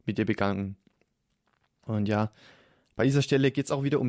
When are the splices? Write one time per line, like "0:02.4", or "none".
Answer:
none